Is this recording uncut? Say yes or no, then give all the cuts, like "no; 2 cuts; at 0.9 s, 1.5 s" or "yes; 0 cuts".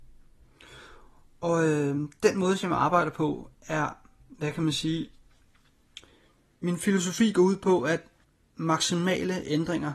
yes; 0 cuts